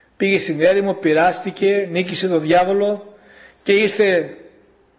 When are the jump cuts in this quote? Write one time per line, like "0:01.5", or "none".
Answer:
none